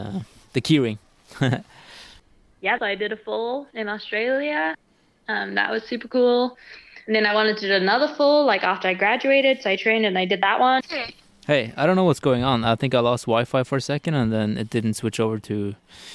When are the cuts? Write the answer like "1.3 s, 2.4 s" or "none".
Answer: 2.8 s, 10.8 s